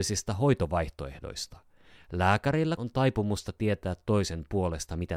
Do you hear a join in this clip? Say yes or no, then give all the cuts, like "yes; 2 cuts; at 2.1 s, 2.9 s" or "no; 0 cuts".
yes; 1 cut; at 2.8 s